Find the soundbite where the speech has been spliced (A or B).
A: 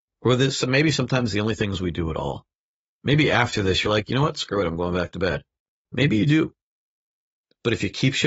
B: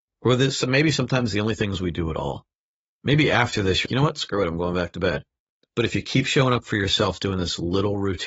B